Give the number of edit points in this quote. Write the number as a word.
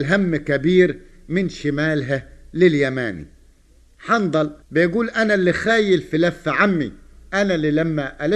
one